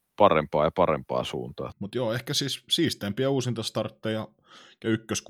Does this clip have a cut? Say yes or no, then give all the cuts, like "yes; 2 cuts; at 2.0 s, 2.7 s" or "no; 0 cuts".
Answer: yes; 1 cut; at 1.7 s